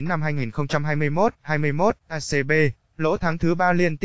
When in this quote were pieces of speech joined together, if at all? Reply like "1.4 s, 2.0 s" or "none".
2.8 s